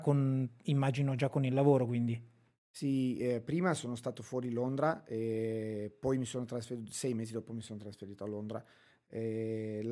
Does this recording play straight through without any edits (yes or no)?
yes